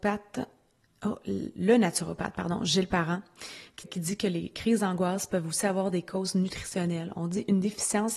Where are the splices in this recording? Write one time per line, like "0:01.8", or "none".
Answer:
0:03.8